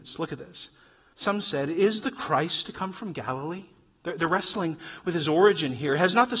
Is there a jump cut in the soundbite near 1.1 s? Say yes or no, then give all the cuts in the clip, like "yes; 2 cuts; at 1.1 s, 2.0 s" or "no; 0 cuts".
yes; 1 cut; at 1.1 s